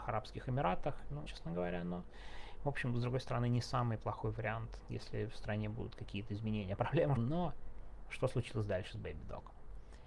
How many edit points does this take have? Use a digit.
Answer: 2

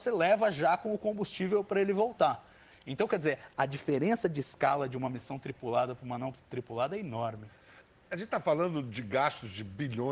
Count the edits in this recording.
1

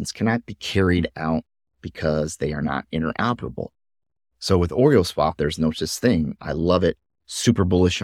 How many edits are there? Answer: 1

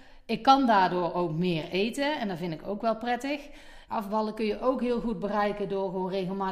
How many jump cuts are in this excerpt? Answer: 1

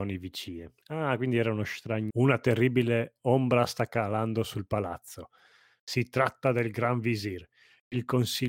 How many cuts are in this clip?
1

